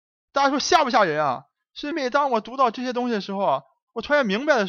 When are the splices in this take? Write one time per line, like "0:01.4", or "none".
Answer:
0:01.9